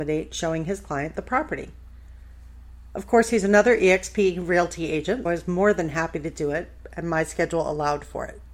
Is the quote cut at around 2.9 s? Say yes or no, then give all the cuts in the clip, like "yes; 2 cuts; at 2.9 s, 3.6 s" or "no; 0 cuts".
no; 1 cut; at 5.3 s